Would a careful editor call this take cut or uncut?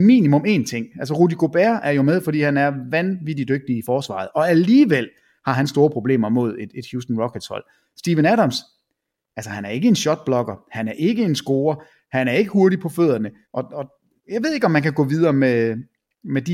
cut